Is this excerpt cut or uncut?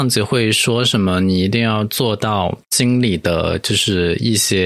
cut